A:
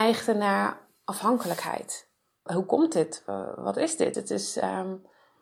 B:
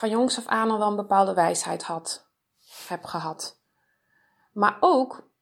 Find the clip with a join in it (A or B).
A